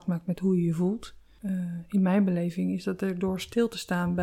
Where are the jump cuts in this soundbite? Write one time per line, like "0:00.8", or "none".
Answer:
0:01.4